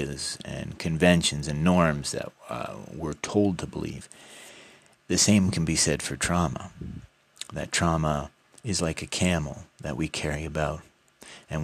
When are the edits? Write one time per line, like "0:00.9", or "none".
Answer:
none